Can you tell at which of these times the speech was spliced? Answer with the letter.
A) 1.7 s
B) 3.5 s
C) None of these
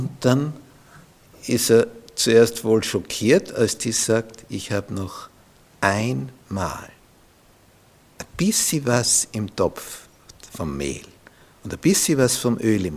C